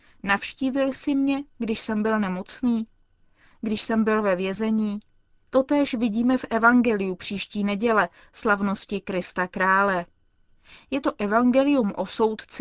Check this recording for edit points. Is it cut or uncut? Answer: cut